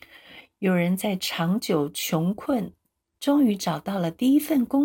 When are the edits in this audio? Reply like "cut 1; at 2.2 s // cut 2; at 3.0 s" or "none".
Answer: none

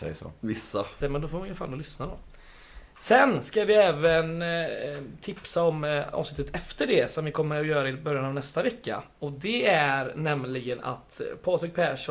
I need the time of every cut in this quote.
cut 1; at 1.0 s

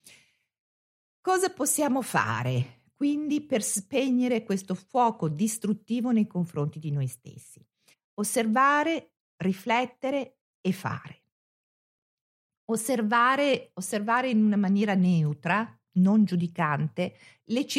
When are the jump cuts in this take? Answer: cut 1; at 7.9 s

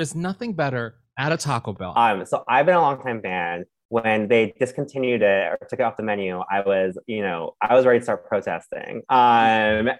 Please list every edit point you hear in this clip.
cut 1; at 1.9 s

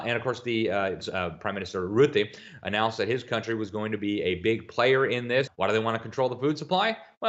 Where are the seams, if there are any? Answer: cut 1; at 1.0 s // cut 2; at 5.5 s

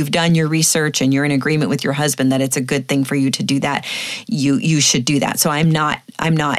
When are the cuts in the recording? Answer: cut 1; at 4.2 s

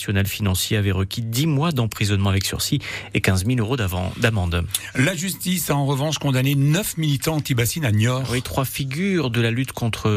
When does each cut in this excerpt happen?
none

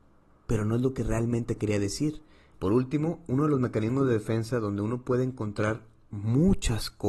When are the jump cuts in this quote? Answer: cut 1; at 2.5 s

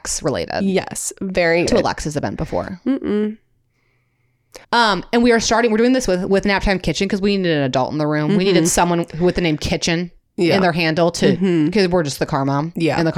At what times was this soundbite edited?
cut 1; at 1.7 s // cut 2; at 4.6 s

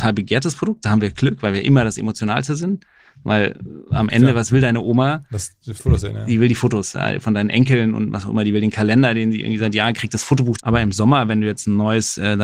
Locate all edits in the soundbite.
cut 1; at 10.6 s

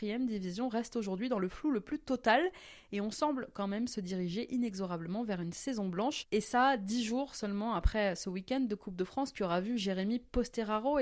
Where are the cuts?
none

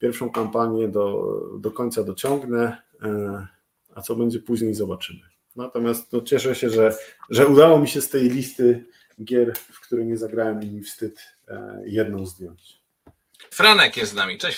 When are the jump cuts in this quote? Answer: cut 1; at 13.5 s

